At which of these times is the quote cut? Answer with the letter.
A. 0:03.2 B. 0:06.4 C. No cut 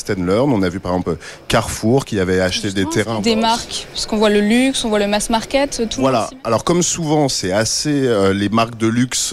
A